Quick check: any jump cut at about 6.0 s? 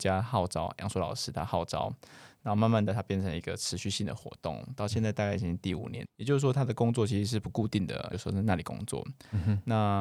yes; 2 cuts; at 6.0 s, 8.1 s

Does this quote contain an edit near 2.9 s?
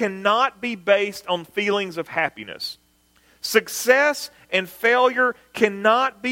no; 0 cuts

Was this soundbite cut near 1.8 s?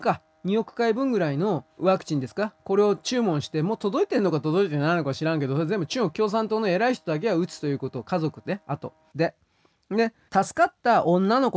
yes; 3 cuts; at 1.8 s, 9.1 s, 10.3 s

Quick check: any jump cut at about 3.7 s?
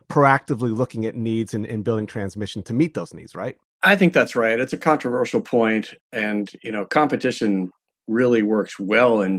no; 0 cuts

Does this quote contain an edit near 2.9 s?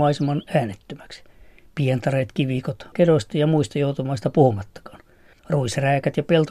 yes; 2 cuts; at 2.9 s, 5.3 s

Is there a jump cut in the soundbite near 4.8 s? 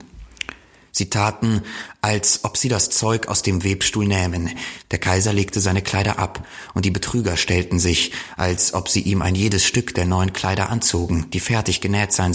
yes; 1 cut; at 4.8 s

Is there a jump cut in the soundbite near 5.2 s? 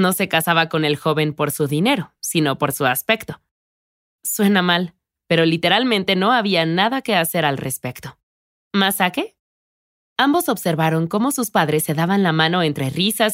yes; 1 cut; at 5.2 s

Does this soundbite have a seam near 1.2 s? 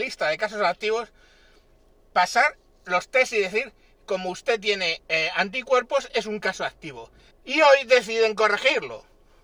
no; 1 cut; at 7.3 s

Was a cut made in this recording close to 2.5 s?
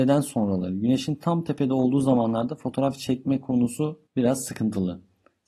no; 1 cut; at 4.1 s

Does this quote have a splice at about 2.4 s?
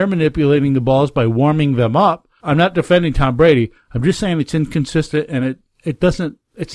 yes; 1 cut; at 2.4 s

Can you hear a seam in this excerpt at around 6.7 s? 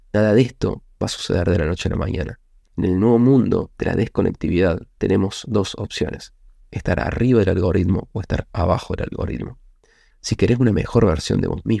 no; 3 cuts; at 2.6 s, 5.0 s, 10.1 s

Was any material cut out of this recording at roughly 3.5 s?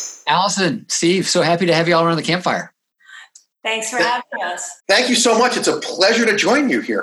no; 1 cut; at 4.8 s

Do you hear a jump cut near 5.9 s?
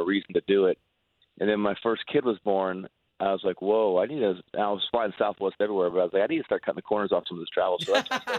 no; 0 cuts

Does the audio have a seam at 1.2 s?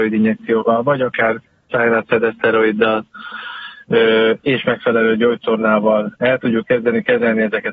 no; 0 cuts

